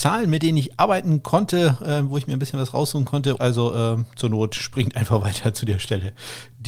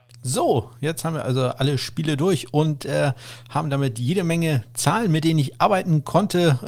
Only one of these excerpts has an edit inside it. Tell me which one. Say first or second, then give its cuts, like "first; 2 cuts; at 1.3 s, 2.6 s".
first; 1 cut; at 3.4 s